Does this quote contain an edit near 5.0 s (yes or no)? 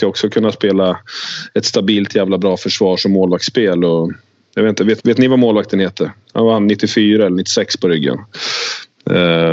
yes